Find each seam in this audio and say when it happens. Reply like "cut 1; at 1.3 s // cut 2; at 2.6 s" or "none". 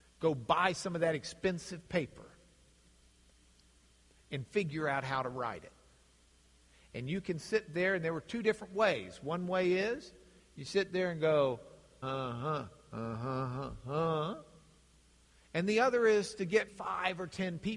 cut 1; at 12.0 s // cut 2; at 16.7 s

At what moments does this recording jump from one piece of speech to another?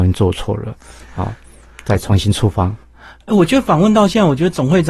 none

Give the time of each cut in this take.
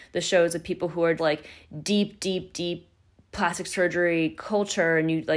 cut 1; at 1.2 s

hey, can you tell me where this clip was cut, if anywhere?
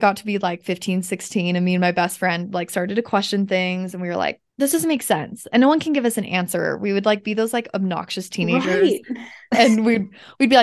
none

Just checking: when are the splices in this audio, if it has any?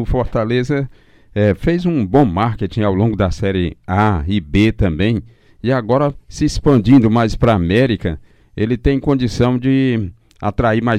none

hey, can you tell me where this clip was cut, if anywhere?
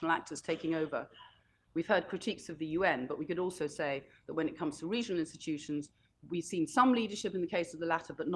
cut 1; at 1.7 s // cut 2; at 6.1 s

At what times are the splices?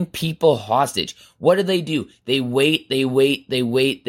none

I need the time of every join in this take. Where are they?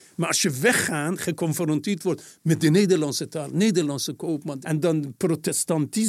cut 1; at 4.6 s

